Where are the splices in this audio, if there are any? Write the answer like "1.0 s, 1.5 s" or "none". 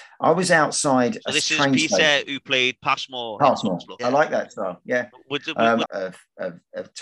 4.0 s, 5.8 s